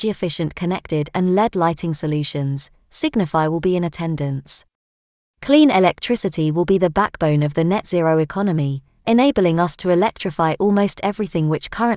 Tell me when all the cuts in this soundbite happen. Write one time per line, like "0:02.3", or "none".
0:05.3